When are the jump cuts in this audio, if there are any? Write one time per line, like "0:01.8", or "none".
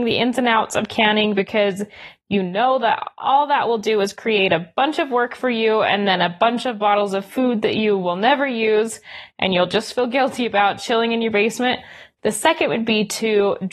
0:12.2